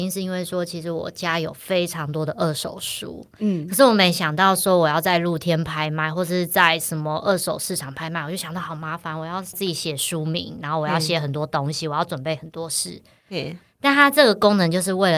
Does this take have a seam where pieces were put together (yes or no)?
no